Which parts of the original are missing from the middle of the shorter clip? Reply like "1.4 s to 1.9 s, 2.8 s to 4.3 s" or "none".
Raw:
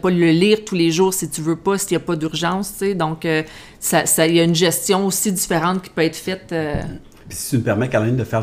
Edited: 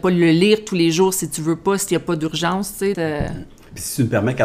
2.9 s to 6.5 s